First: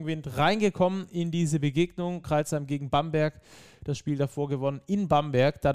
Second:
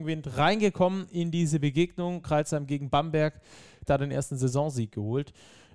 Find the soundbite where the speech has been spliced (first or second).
second